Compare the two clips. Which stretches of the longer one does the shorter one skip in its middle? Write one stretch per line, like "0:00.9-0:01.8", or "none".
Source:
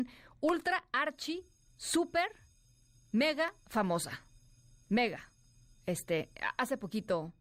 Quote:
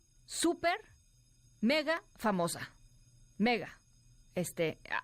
none